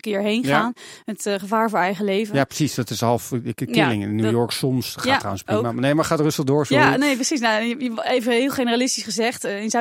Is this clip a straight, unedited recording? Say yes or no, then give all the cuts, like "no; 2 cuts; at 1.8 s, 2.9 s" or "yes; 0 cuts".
yes; 0 cuts